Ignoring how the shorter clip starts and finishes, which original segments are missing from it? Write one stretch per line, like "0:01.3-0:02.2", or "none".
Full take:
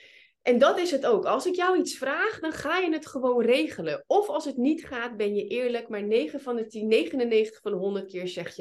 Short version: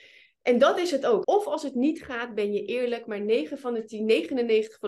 0:01.2-0:04.0